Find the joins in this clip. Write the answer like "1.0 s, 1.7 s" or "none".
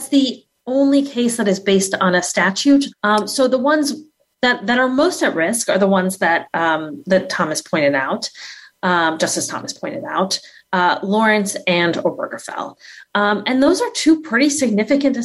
2.9 s